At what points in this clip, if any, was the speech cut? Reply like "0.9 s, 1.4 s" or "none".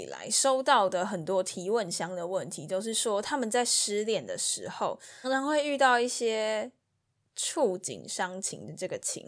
5.2 s